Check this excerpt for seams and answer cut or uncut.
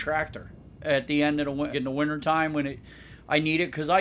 cut